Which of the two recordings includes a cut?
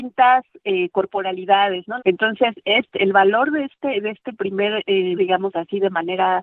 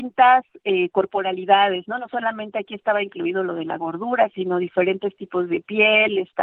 first; 2 cuts; at 2.0 s, 5.2 s

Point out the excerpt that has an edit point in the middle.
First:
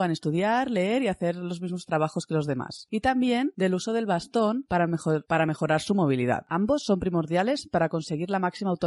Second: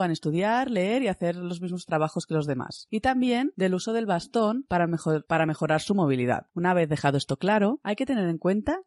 second; 2 cuts; at 6.5 s, 7.8 s

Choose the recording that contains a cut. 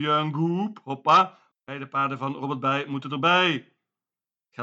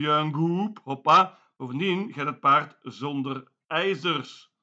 first; 1 cut; at 1.5 s

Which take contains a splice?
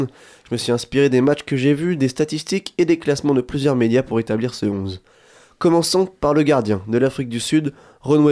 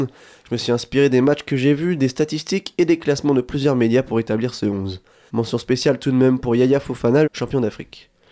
second; 2 cuts; at 5.3 s, 7.2 s

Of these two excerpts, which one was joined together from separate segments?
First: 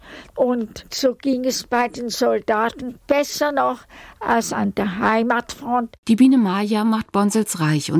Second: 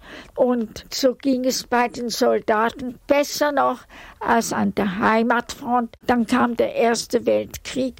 second; 1 cut; at 6.0 s

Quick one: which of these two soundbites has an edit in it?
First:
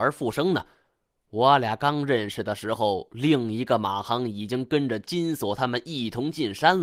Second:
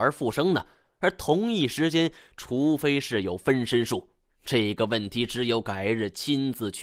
second; 1 cut; at 1.0 s

